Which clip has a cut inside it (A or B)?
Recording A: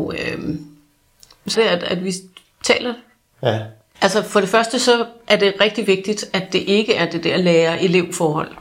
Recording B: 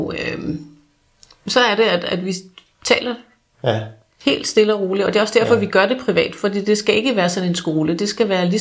A